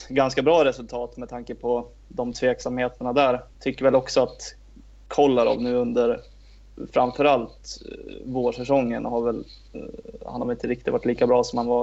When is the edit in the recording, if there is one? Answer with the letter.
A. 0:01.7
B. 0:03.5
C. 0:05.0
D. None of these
B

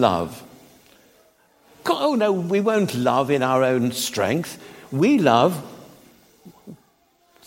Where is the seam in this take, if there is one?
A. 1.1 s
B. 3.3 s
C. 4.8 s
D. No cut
D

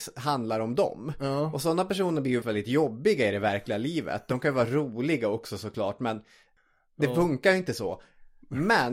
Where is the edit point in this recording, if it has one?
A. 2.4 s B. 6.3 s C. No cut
A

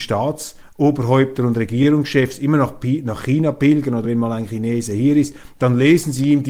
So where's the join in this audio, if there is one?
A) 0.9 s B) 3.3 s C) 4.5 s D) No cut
D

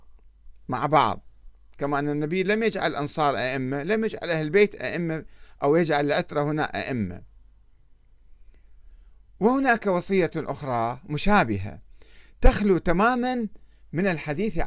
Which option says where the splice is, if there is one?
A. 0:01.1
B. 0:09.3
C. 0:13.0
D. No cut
D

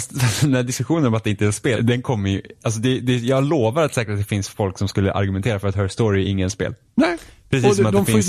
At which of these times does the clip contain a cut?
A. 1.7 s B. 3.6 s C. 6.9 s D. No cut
A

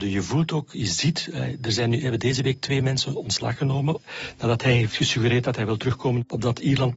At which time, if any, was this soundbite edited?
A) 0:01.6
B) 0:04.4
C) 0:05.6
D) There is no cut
D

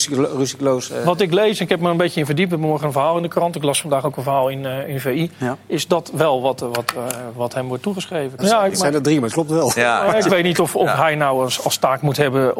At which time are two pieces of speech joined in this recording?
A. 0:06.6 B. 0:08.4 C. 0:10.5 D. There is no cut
B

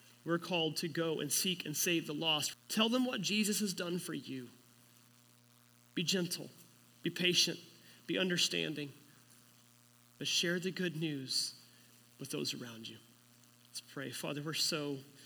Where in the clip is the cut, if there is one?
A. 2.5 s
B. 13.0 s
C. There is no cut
A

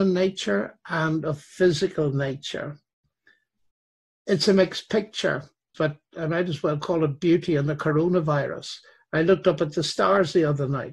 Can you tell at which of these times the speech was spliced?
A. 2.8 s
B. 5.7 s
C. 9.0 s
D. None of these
B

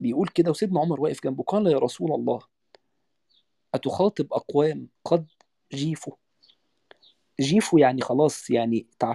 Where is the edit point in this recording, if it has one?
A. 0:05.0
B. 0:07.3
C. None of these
A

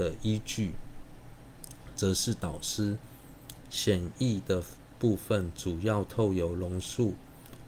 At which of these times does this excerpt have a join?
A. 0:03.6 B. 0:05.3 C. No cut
A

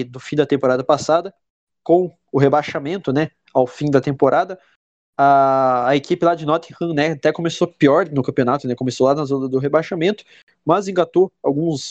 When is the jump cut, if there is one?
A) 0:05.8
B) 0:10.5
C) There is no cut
C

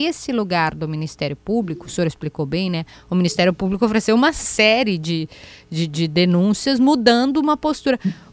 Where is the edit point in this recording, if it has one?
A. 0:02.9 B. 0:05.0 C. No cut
A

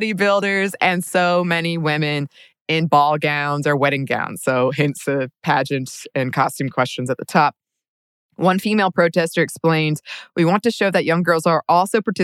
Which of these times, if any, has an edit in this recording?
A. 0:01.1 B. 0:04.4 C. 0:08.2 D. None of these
A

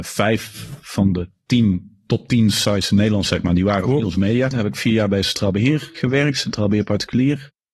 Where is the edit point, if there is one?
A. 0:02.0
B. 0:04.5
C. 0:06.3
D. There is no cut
B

